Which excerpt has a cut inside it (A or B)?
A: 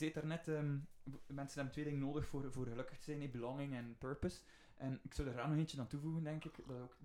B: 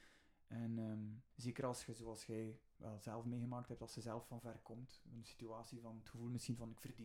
B